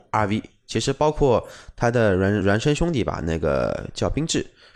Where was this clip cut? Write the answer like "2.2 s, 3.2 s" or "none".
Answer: 2.4 s